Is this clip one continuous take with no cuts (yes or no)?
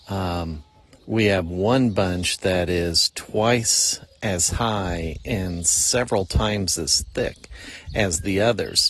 yes